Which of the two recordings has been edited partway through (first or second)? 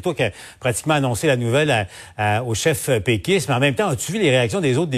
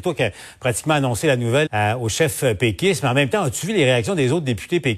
second